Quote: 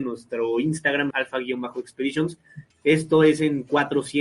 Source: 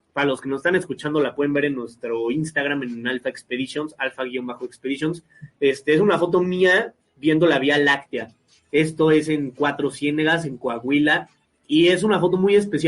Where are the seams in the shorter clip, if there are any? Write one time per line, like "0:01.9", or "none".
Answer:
0:01.1
0:02.7

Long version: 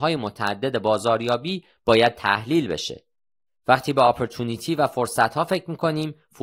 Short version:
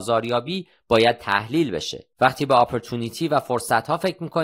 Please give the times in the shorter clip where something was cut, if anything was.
0:02.1

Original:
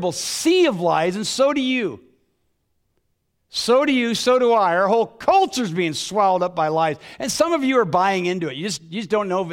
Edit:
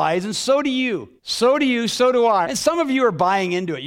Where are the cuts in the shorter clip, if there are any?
0:01.2
0:02.4

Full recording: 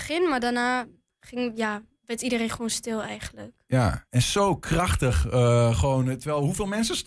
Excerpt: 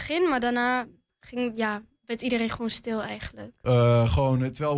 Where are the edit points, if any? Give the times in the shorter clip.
0:03.6

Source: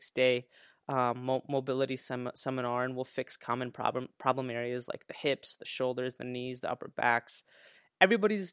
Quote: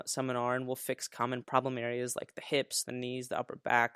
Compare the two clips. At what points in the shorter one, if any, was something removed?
0:01.4
0:02.8

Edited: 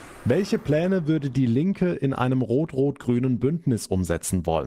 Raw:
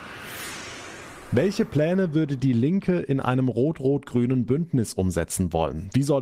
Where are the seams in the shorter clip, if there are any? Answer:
none

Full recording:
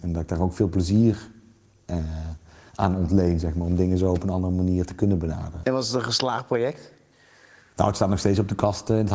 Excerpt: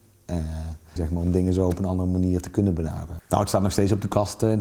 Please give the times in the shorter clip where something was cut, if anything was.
0:01.0
0:03.2

